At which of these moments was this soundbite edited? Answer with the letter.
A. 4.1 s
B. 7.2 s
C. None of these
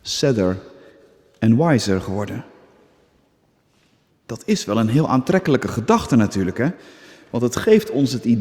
A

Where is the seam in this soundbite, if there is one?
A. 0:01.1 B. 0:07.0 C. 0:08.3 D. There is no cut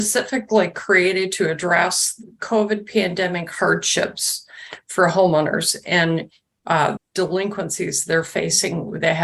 B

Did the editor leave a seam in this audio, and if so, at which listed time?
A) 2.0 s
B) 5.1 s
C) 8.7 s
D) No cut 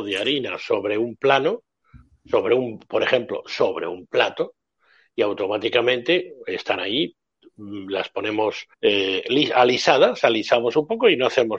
C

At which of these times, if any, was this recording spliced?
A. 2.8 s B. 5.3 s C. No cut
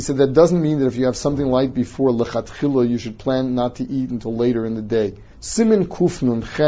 B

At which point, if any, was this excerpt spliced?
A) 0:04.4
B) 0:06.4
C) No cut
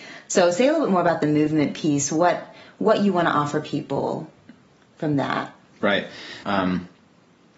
B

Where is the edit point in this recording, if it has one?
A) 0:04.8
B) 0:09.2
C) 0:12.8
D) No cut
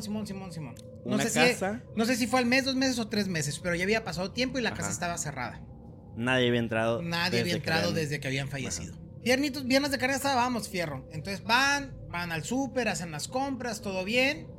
B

